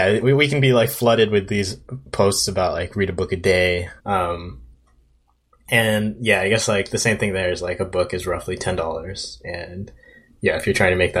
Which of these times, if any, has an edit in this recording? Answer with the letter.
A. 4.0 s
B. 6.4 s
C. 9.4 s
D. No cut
A